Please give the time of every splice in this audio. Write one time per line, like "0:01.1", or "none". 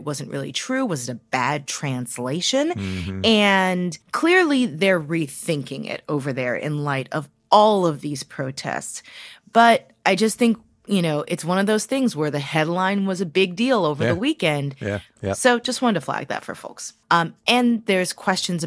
0:04.0
0:15.2
0:17.0